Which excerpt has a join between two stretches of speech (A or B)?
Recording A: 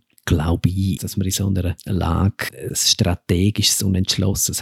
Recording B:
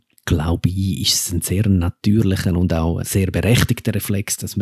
A